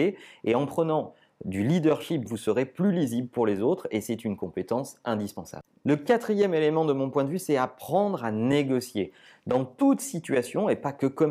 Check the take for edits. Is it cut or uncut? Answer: cut